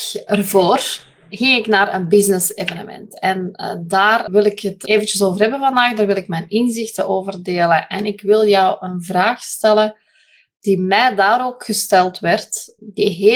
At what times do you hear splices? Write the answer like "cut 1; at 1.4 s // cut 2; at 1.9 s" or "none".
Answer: none